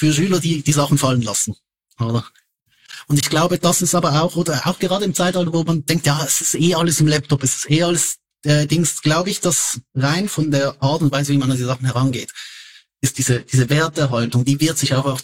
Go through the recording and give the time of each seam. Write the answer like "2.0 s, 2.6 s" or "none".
none